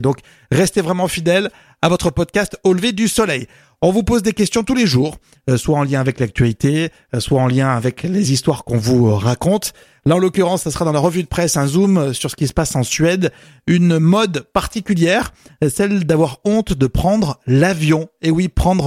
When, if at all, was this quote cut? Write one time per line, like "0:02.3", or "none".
none